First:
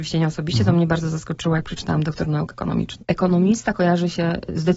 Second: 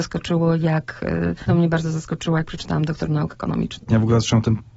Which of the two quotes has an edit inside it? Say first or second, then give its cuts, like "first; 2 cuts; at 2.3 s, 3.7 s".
second; 2 cuts; at 1.5 s, 3.9 s